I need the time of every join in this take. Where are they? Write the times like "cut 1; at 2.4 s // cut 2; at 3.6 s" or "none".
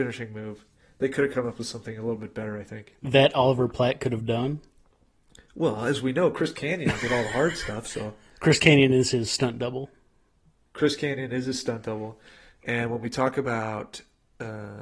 none